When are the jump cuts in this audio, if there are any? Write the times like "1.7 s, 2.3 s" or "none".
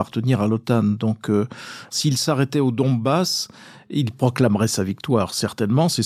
none